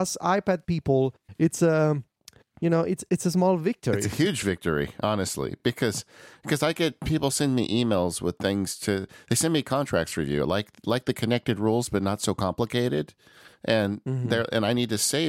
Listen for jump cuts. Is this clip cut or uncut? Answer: uncut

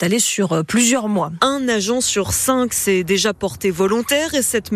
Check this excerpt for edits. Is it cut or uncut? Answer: cut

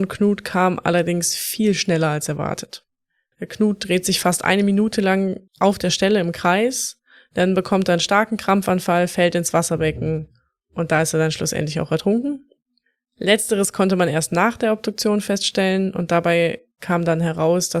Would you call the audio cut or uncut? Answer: cut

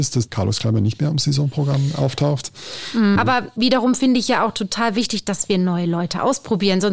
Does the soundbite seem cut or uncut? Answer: cut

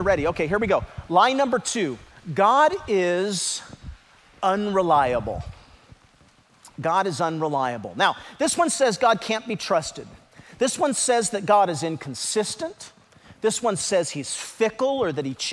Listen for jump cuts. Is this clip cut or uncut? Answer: uncut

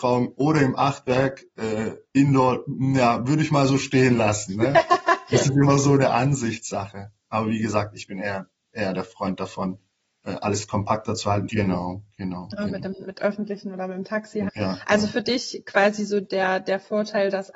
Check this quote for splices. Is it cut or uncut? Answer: cut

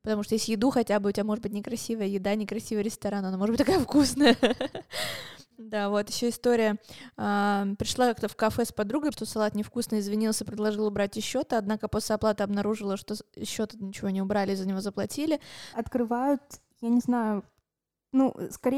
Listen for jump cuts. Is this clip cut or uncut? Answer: cut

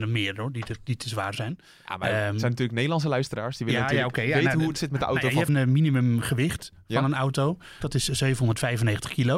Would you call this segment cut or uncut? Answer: cut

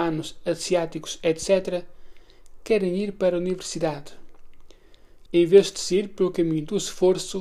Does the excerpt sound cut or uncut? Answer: cut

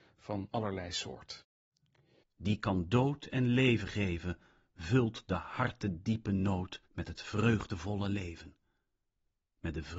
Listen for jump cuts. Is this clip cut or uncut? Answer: cut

